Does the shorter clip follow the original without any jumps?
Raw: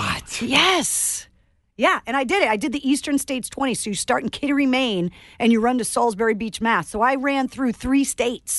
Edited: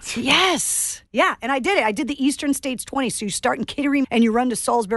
no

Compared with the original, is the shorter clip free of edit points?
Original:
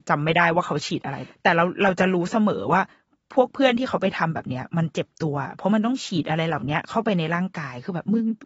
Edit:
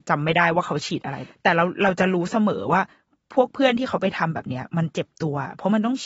yes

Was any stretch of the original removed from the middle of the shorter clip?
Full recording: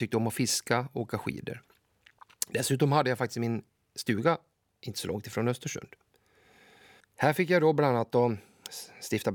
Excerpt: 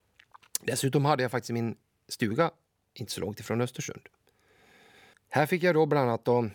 no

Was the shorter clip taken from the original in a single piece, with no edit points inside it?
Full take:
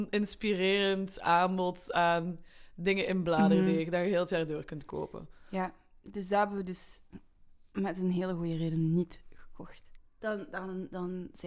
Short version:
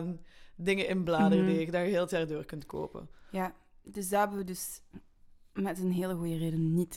yes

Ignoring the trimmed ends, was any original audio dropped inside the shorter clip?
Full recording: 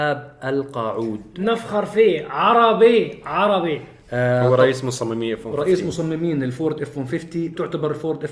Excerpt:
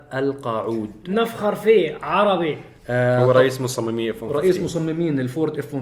yes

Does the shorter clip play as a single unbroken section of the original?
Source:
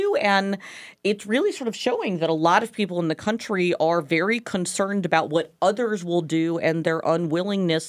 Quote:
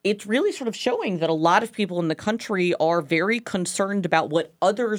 yes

